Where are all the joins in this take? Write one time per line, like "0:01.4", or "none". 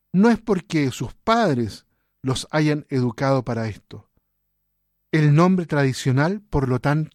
0:04.9